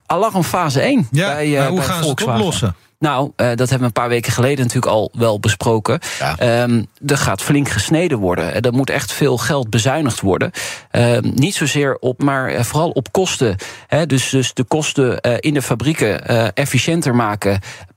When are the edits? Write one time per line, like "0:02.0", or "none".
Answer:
0:12.2